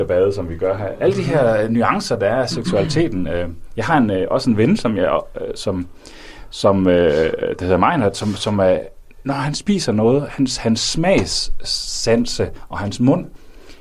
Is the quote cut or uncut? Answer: uncut